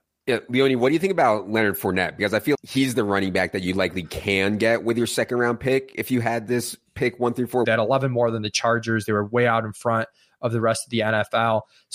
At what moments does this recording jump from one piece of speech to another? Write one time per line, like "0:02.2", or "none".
0:02.5
0:07.6